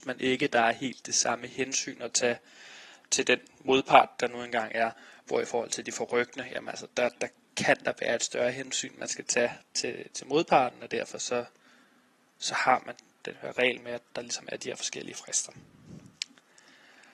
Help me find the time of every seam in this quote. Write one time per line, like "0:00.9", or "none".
none